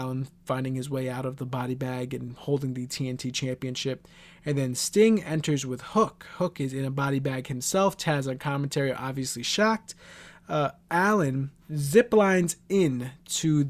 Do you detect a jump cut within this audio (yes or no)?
no